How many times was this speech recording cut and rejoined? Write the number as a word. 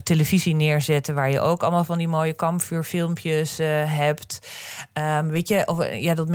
zero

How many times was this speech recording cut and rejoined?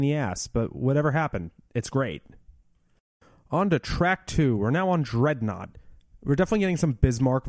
zero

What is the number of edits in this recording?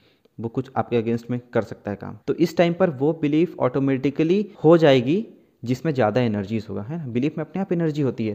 two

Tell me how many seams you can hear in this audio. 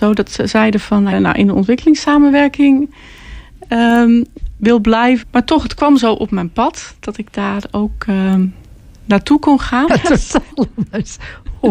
three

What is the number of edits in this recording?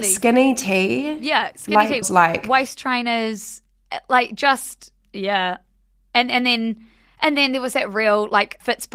one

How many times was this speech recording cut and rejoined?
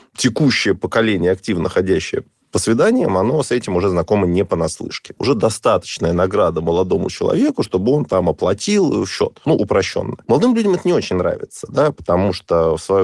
one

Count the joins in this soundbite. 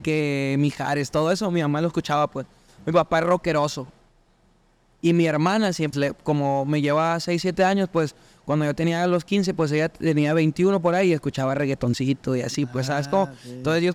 one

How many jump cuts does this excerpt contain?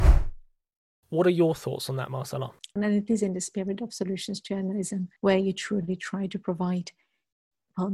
two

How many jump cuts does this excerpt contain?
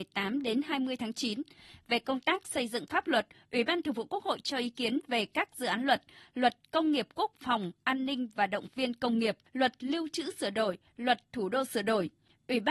two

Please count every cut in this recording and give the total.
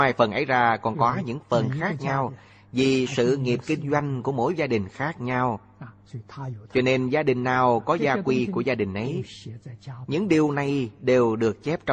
zero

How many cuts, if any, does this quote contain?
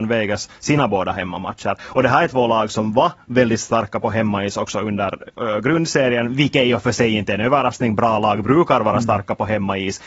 zero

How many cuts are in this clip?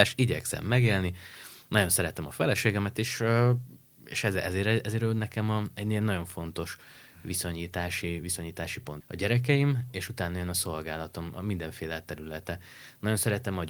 one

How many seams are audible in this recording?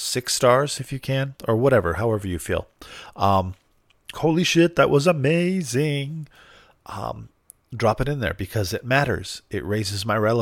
one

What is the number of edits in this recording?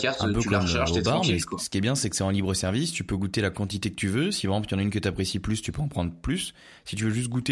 zero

